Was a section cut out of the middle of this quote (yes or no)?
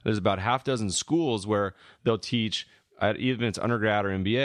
no